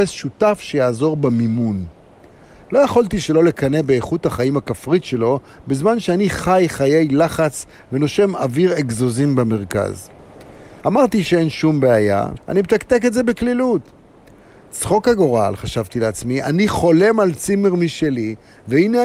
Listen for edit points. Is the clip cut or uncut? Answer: cut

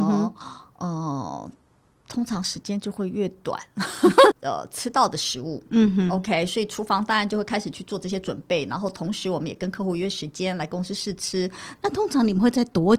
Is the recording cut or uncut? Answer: cut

